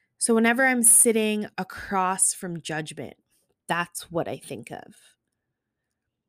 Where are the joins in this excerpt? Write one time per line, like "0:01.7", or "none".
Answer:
none